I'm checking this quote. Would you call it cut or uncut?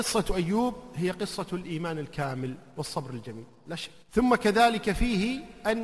cut